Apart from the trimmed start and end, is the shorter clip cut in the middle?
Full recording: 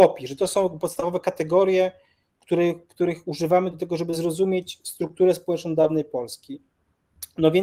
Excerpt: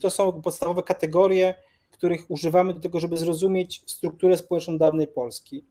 yes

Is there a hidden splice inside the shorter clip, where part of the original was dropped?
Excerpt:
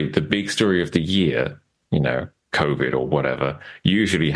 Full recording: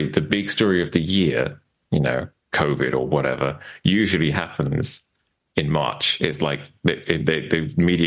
no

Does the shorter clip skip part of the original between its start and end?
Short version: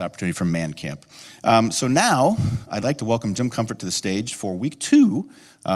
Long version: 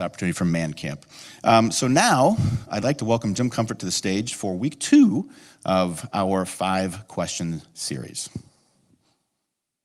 no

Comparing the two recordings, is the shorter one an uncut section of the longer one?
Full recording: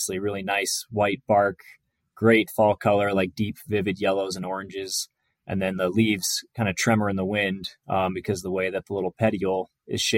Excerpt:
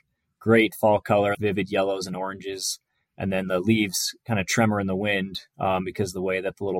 no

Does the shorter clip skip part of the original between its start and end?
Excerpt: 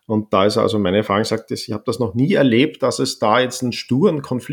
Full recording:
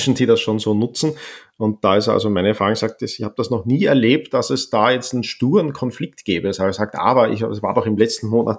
no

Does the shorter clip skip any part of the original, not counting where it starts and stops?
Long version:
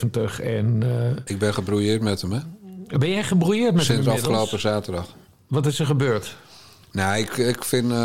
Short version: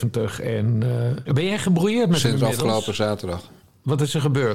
yes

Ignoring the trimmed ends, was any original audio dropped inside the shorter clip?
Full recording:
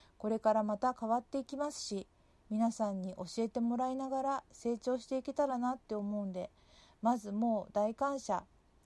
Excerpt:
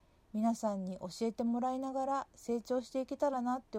no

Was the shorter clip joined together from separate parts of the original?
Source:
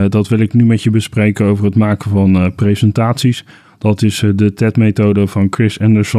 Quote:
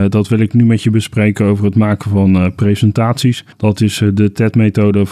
yes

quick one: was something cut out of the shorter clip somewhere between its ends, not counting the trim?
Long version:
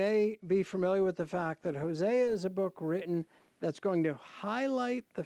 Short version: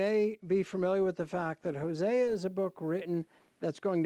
no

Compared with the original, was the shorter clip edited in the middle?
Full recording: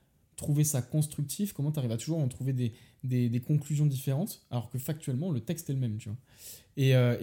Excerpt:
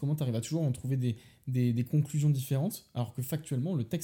no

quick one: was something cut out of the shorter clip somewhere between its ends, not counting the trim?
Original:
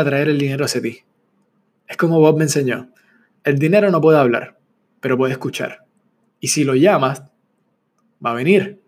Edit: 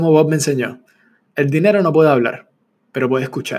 no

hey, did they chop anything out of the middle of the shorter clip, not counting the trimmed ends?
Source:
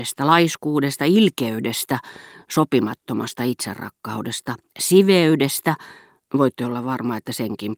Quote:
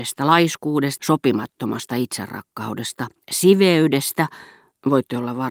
yes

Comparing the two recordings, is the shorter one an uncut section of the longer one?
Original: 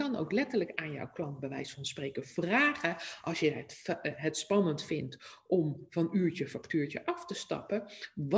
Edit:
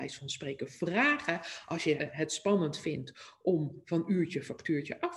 no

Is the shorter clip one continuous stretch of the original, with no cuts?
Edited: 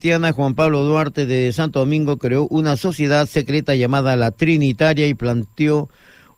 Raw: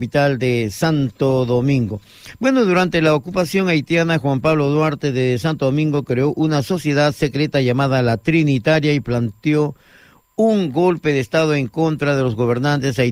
yes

